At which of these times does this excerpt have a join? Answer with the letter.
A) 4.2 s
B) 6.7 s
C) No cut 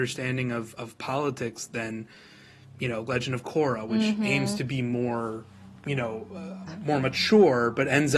B